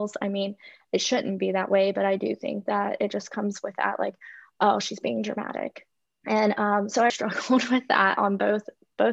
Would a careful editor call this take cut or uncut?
cut